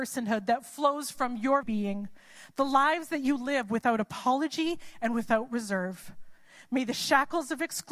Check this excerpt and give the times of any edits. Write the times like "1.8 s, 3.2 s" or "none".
1.6 s